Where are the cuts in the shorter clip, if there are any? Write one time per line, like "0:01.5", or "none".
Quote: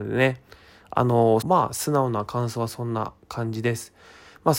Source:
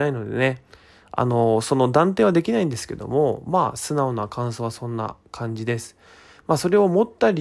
0:01.4